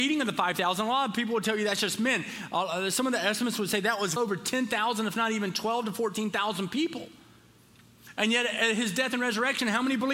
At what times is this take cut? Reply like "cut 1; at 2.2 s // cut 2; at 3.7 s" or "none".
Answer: cut 1; at 4.2 s